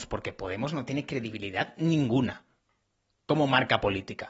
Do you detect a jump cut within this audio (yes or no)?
no